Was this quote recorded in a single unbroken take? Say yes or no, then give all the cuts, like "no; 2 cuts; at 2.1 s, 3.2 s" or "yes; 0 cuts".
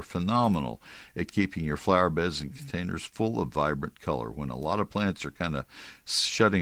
yes; 0 cuts